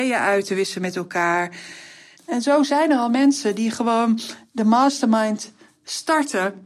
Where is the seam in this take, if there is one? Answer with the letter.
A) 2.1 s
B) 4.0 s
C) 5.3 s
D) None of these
A